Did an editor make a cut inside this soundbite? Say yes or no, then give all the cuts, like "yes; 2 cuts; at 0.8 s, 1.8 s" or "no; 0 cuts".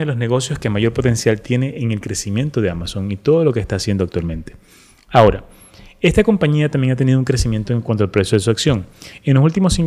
no; 0 cuts